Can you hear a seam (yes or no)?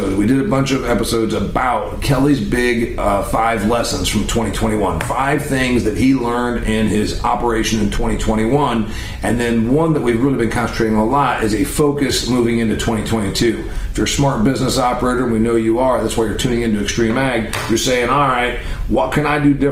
no